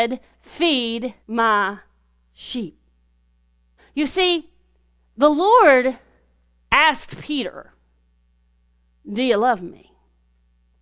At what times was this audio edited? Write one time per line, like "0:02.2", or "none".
0:01.2
0:03.8